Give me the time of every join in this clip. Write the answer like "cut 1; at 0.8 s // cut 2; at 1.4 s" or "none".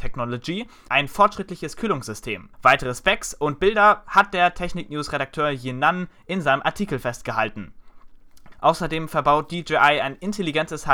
cut 1; at 2.5 s // cut 2; at 8.5 s

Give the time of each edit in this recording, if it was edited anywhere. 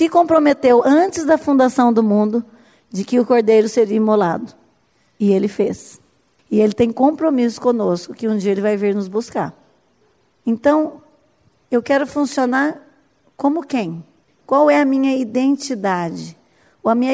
none

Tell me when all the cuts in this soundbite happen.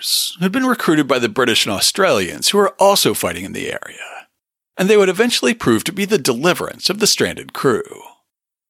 none

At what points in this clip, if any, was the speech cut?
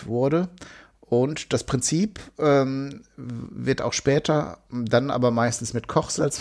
none

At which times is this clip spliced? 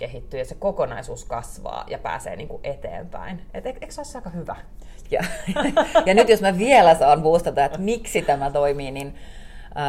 cut 1; at 5.1 s

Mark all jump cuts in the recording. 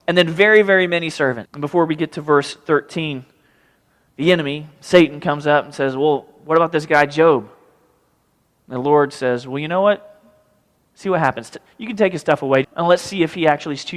cut 1; at 1.5 s // cut 2; at 10.8 s // cut 3; at 12.6 s

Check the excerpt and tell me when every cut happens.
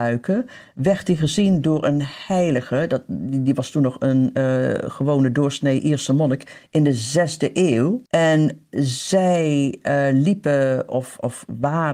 cut 1; at 8.1 s

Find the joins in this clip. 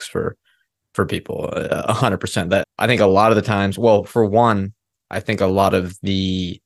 cut 1; at 2.6 s

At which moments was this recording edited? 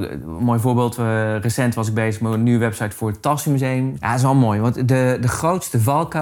cut 1; at 4.0 s

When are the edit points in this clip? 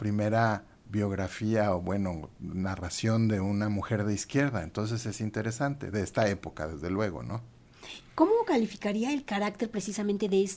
none

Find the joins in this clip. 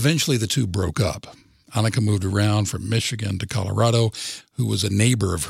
cut 1; at 4.4 s

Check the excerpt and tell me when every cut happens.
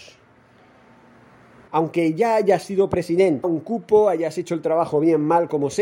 cut 1; at 1.7 s // cut 2; at 3.4 s

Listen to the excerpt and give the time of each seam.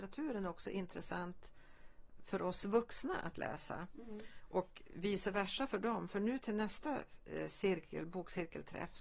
none

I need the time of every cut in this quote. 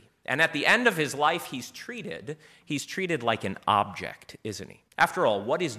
cut 1; at 4.9 s

